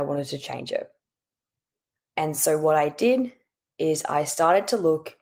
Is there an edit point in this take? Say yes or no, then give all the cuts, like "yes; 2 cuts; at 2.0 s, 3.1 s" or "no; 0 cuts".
no; 0 cuts